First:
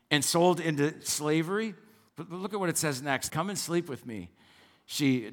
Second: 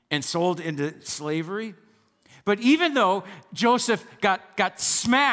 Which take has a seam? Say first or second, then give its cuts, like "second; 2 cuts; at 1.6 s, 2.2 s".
first; 2 cuts; at 2.1 s, 3.3 s